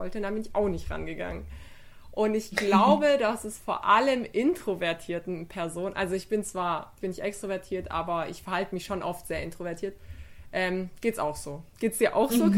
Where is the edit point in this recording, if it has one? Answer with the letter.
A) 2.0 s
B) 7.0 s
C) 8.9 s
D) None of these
B